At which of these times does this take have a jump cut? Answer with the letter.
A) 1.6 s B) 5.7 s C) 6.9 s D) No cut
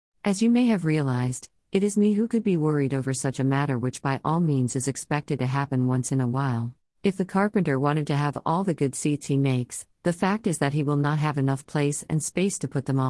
C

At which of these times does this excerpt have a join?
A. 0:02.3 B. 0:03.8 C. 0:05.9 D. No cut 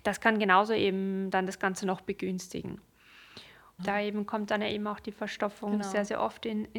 B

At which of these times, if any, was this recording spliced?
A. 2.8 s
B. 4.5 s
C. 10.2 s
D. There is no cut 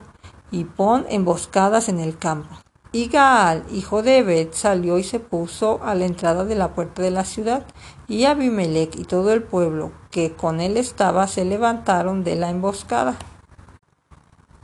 A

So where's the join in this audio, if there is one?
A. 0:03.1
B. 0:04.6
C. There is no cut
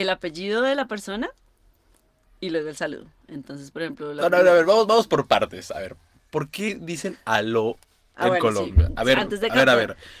C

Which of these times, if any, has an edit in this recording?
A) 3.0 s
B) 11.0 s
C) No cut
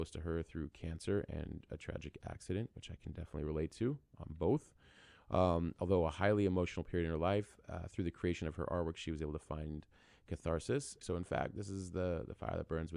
B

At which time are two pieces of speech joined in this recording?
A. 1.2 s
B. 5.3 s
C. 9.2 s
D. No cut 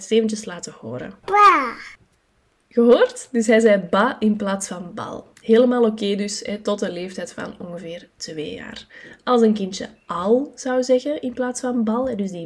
A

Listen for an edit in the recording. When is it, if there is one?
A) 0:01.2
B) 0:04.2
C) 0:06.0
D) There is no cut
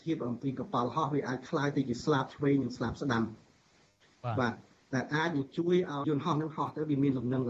C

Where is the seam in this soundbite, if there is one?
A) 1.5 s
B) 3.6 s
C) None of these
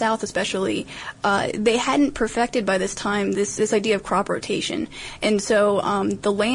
B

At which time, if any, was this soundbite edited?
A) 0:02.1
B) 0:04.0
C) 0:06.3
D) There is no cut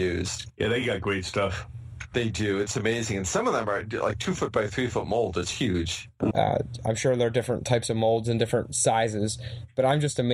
C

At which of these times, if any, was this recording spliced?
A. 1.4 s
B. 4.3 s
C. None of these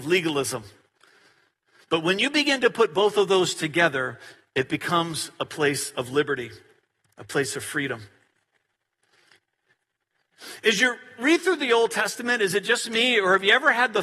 C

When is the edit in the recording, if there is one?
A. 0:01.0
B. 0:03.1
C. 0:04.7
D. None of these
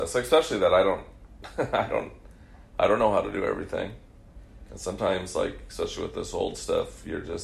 C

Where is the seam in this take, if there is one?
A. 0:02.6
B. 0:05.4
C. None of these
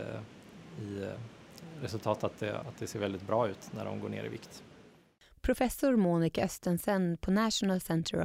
A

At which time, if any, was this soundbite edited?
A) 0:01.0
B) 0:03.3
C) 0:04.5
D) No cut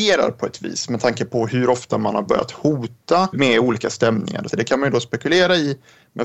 C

